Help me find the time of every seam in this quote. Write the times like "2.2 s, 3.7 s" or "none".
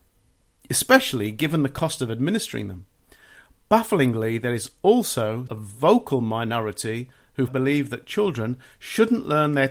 5.5 s, 7.5 s